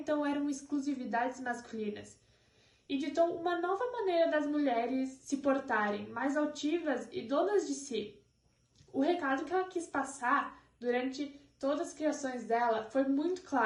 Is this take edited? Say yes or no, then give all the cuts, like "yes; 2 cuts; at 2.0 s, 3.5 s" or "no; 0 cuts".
no; 0 cuts